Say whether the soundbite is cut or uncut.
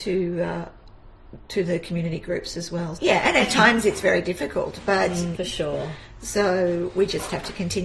cut